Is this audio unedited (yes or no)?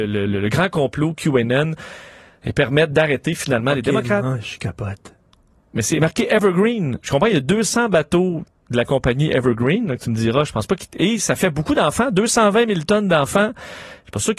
yes